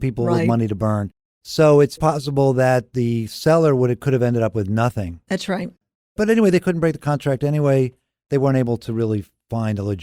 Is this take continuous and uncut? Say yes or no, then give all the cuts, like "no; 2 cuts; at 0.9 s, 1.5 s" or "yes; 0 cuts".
no; 1 cut; at 2.0 s